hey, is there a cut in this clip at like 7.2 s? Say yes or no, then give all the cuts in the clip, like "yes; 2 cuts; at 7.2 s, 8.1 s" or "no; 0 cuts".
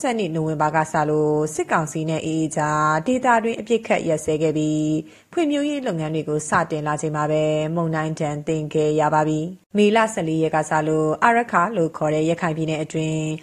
no; 1 cut; at 9.6 s